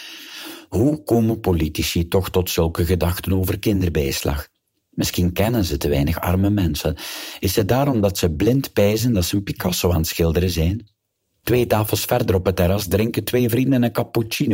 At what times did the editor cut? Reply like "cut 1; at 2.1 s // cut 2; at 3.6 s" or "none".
cut 1; at 11.4 s